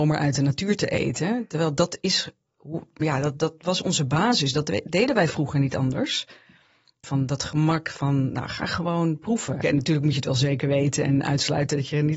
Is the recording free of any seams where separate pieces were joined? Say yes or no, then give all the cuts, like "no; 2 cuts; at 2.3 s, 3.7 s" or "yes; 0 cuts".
no; 2 cuts; at 7.0 s, 9.6 s